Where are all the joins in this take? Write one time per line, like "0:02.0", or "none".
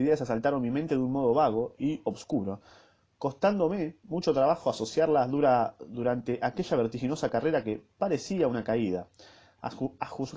none